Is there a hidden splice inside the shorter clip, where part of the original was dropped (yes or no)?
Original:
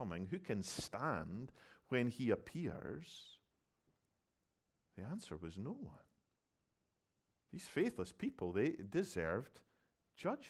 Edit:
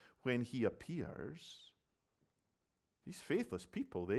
yes